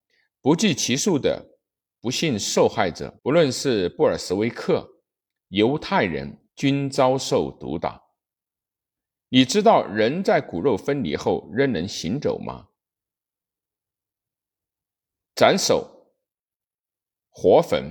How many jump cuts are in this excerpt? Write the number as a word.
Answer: two